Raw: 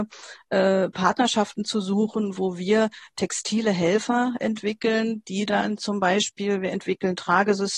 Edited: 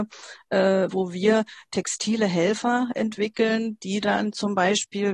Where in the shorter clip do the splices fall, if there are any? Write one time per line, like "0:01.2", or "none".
0:00.9